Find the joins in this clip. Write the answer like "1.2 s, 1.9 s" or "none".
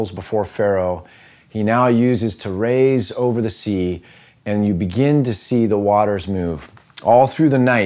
none